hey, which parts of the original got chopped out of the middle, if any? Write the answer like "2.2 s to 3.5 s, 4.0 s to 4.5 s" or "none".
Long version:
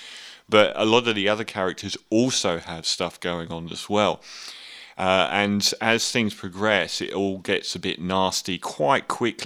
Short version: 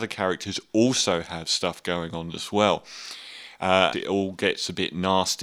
5.3 s to 7.0 s